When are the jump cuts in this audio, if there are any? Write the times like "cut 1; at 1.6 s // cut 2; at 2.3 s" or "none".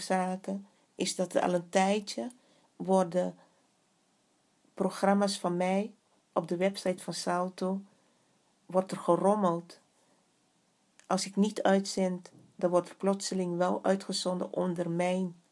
cut 1; at 2.6 s